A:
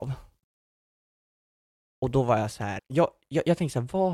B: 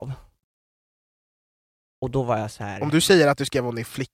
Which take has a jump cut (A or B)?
A